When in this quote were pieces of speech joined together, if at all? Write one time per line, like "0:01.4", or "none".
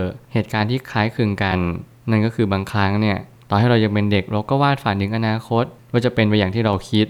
none